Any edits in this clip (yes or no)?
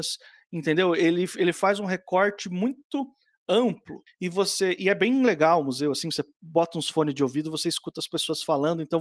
no